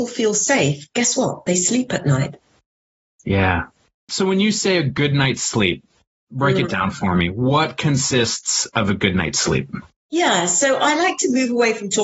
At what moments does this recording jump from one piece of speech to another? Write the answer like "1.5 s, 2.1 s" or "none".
none